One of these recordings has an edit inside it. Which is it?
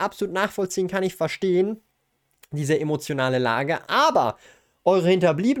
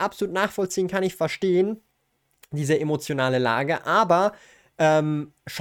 first; 1 cut; at 3.8 s

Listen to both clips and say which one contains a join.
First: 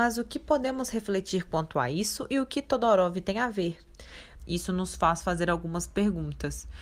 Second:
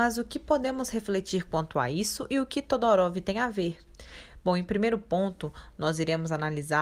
first; 1 cut; at 4.4 s

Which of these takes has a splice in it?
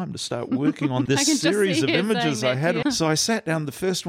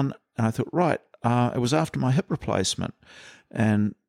first; 2 cuts; at 1.1 s, 2.8 s

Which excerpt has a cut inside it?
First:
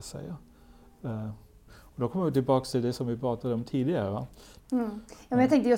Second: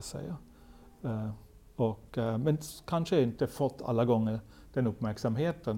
first; 2 cuts; at 1.7 s, 4.6 s

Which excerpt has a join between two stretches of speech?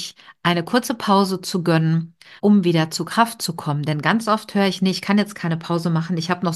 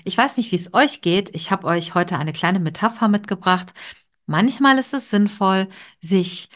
first; 1 cut; at 2.4 s

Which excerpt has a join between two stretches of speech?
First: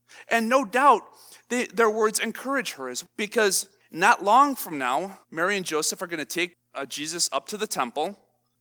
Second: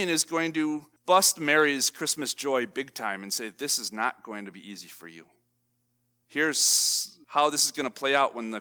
first; 2 cuts; at 3.0 s, 5.2 s

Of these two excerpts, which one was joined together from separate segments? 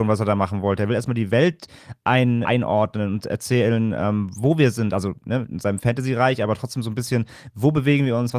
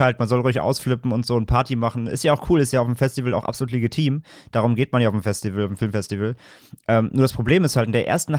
first; 1 cut; at 2.4 s

